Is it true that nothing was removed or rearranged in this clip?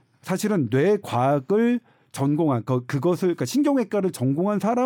yes; 0 cuts

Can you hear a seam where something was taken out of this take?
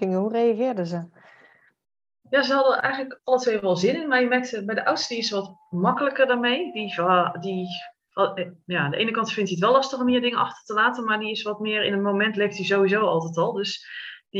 no; 0 cuts

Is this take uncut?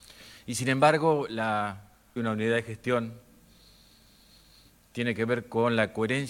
no; 1 cut; at 2.2 s

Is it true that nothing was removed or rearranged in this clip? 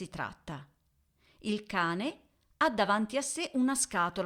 yes; 0 cuts

